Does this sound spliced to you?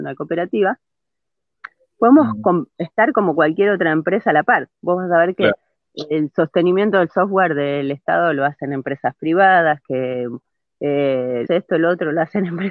yes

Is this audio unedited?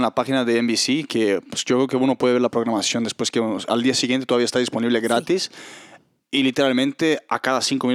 yes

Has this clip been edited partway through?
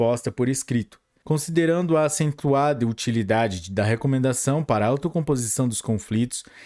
yes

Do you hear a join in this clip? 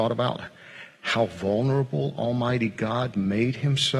no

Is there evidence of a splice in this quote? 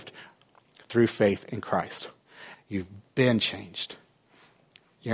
yes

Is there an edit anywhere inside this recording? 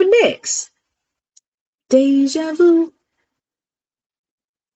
no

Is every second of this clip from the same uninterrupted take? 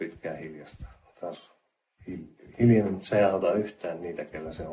yes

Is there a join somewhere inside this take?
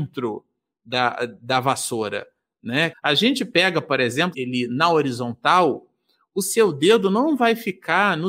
yes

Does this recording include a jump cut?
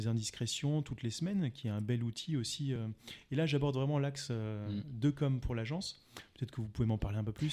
no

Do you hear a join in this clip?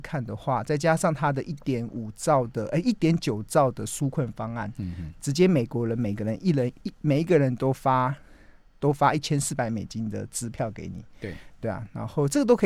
no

